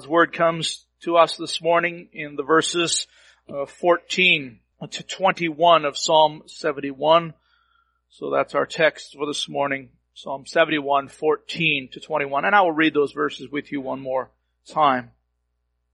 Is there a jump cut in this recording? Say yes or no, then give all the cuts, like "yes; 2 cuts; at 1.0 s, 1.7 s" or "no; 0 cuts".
no; 0 cuts